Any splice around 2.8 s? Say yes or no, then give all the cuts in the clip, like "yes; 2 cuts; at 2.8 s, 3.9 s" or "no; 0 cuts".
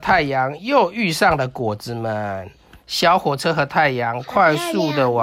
yes; 1 cut; at 2.8 s